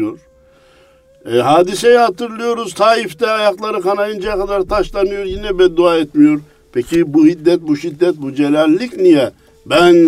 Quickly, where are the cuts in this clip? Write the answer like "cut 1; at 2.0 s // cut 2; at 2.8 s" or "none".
none